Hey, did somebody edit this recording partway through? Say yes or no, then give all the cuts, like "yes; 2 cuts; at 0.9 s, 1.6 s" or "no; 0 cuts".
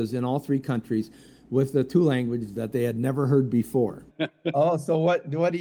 yes; 1 cut; at 4.1 s